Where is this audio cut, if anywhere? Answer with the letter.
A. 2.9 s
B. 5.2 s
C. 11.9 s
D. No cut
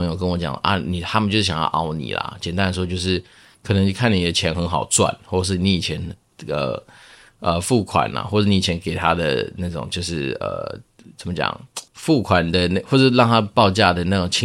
C